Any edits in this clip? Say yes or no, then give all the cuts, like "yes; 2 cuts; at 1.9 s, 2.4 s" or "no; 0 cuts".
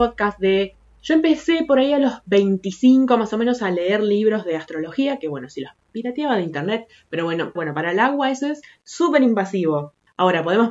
yes; 1 cut; at 7.6 s